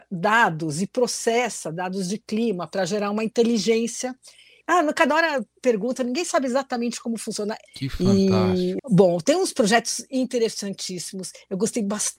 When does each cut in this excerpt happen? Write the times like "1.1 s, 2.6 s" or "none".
4.6 s, 7.7 s, 8.8 s